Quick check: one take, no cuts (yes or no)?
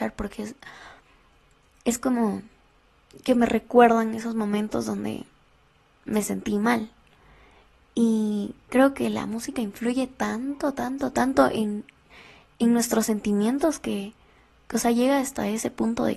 yes